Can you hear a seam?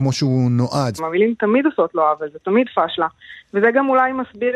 yes; 1 cut; at 1.0 s

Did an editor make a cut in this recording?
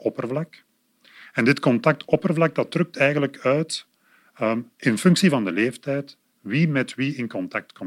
yes; 1 cut; at 4.7 s

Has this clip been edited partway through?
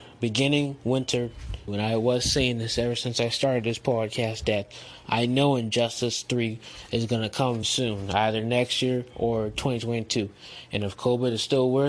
yes; 2 cuts; at 1.7 s, 7.6 s

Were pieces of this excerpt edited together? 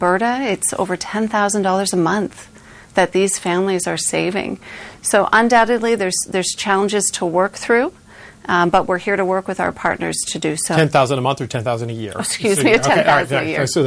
no; 0 cuts

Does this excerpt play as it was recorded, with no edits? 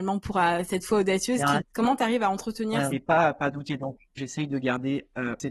no; 3 cuts; at 1.6 s, 2.9 s, 4.2 s

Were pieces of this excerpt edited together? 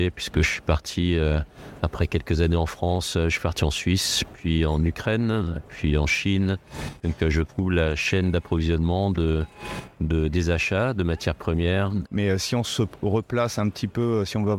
yes; 2 cuts; at 7.0 s, 12.1 s

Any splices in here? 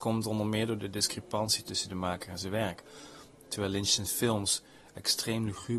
no; 0 cuts

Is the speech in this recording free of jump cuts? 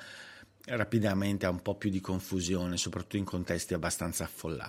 yes; 0 cuts

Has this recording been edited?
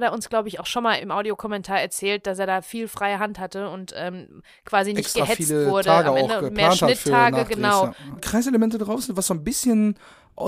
yes; 2 cuts; at 1.0 s, 8.2 s

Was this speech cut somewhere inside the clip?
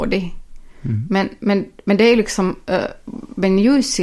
no; 0 cuts

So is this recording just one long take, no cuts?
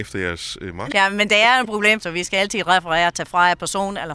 no; 2 cuts; at 0.9 s, 2.0 s

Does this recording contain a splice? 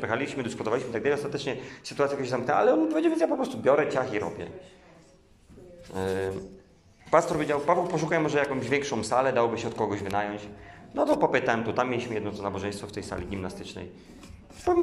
no; 0 cuts

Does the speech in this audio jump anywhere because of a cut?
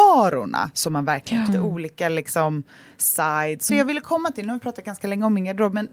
yes; 2 cuts; at 1.5 s, 3.7 s

